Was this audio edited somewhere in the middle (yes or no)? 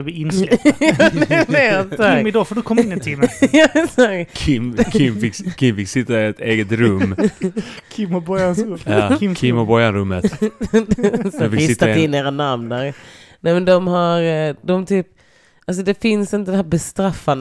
no